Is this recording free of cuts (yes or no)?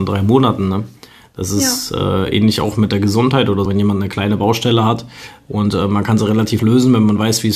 no